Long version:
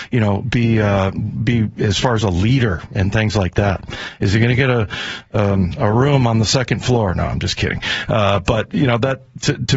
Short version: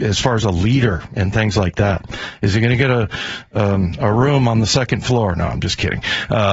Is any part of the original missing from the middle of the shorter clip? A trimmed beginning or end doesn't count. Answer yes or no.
no